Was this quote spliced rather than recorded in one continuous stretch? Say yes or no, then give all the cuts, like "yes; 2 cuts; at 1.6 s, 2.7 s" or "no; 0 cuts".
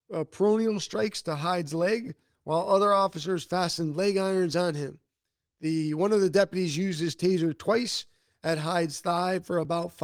no; 0 cuts